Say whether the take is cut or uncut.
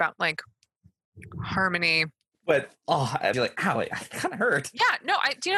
cut